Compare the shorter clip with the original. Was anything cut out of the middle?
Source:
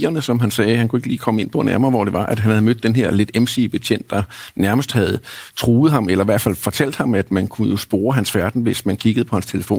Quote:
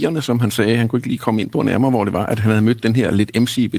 no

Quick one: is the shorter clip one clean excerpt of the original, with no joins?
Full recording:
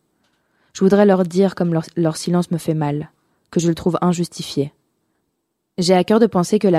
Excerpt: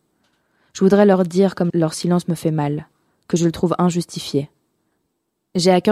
no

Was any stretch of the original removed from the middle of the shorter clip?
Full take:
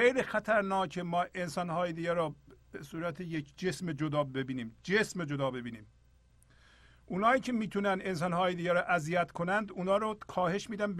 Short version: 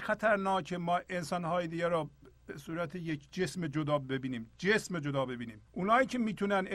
yes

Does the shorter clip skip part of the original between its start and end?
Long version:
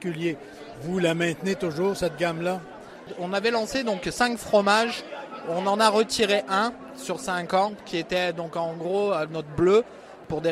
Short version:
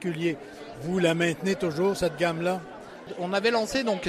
no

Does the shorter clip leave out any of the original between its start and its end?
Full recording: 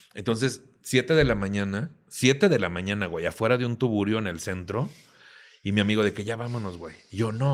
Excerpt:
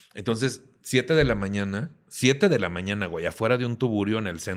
no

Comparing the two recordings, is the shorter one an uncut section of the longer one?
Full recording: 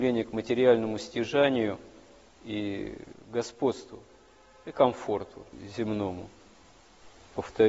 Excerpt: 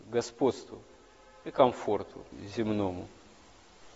yes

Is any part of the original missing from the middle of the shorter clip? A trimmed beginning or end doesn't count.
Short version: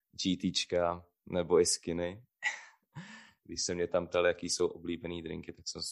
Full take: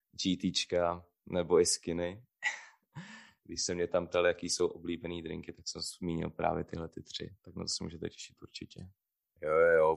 no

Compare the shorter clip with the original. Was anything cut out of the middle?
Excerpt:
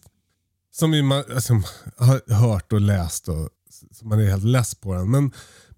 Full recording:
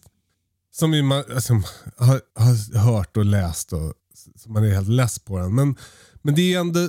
yes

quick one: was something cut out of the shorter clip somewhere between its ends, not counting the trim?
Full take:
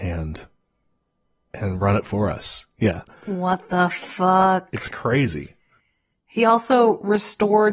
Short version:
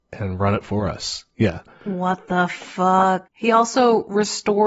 yes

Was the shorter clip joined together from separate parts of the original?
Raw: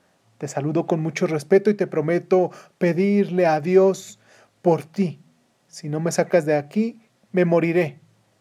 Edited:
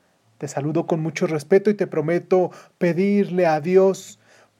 no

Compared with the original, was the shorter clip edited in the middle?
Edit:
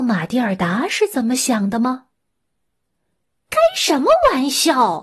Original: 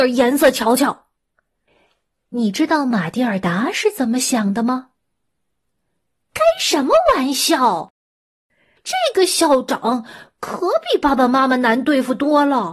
no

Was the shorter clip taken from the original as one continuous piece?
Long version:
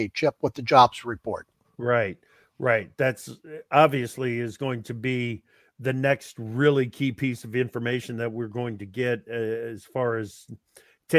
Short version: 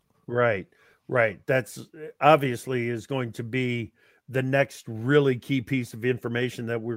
yes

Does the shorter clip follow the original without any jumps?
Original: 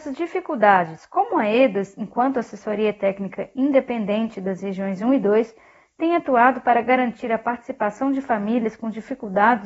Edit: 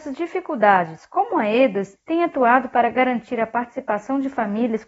no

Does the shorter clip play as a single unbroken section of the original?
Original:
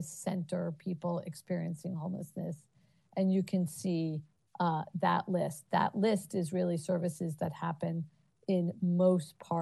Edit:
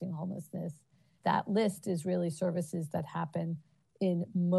no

